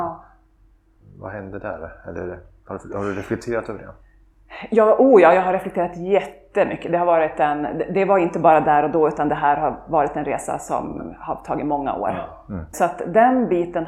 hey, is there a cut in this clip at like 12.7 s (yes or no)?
yes